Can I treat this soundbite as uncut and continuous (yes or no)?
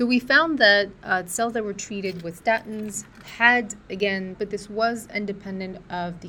no